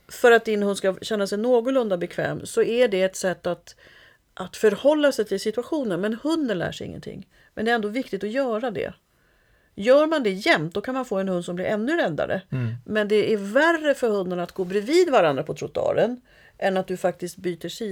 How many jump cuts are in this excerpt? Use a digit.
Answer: 0